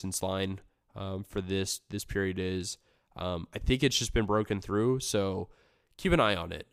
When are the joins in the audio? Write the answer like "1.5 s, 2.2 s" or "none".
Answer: none